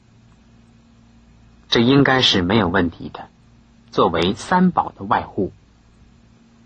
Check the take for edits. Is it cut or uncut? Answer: cut